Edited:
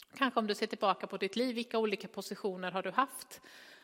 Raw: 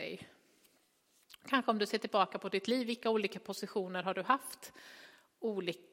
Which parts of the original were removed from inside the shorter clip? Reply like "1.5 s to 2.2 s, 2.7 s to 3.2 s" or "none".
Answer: none